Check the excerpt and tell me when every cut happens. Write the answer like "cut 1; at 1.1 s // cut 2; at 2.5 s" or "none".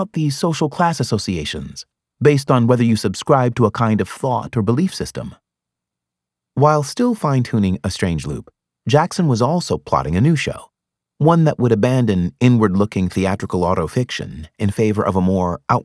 cut 1; at 2.1 s